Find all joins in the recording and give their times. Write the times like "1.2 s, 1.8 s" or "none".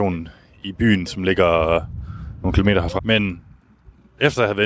3.0 s